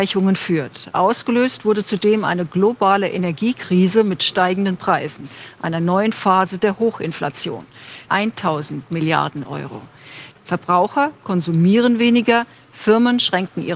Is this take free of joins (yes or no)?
no